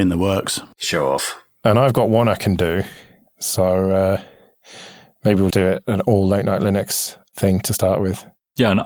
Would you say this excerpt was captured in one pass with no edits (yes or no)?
no